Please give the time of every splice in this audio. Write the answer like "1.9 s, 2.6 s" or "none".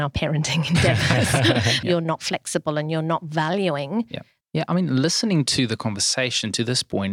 1.8 s, 4.4 s